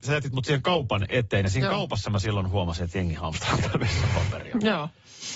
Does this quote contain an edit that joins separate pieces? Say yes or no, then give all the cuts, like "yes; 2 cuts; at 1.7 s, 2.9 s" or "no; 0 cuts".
no; 0 cuts